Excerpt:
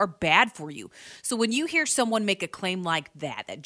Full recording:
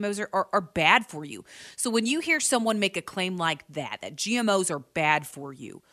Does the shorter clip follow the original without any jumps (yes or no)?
yes